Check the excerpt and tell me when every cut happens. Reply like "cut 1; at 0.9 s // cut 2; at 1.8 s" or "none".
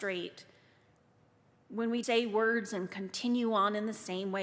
cut 1; at 2.0 s